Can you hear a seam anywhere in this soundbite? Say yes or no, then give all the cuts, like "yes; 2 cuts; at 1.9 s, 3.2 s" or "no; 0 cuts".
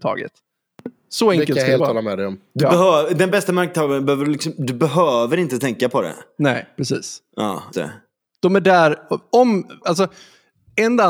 yes; 2 cuts; at 7.7 s, 9.8 s